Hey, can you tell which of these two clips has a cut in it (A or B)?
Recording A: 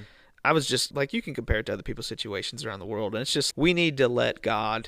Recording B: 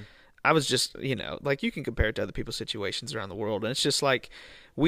A